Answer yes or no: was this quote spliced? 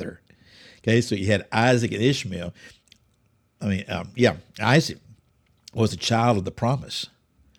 no